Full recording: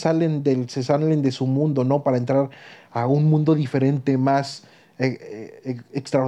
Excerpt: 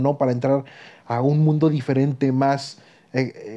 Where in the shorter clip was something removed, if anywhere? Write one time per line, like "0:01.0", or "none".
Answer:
none